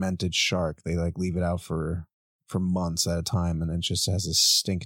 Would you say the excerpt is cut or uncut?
uncut